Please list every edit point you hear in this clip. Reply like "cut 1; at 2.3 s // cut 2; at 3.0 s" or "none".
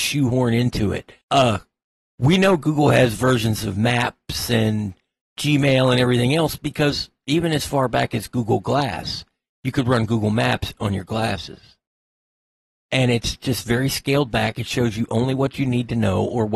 cut 1; at 1.2 s